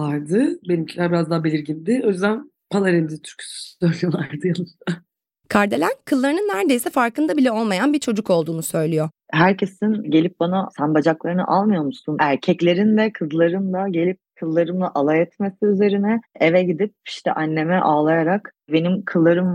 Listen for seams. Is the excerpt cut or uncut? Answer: cut